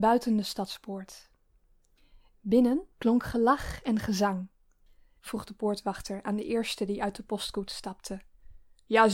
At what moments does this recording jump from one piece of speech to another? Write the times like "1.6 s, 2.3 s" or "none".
2.9 s, 5.2 s